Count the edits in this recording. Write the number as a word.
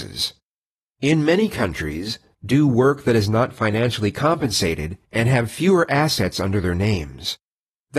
two